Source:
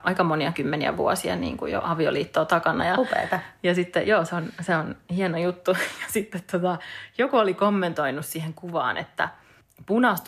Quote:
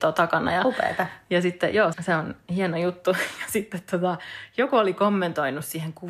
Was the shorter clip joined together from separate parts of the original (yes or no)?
yes